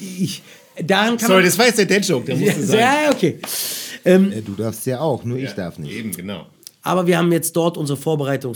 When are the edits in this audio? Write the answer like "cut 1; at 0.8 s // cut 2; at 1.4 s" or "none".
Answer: none